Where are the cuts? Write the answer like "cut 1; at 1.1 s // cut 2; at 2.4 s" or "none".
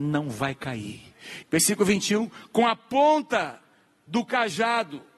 cut 1; at 1.4 s